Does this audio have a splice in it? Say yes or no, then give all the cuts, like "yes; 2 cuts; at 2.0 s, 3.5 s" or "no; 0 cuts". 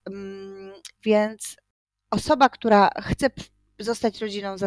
yes; 1 cut; at 1.0 s